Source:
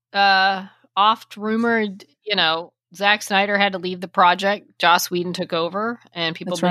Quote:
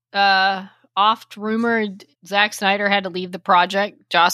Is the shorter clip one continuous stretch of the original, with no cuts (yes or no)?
no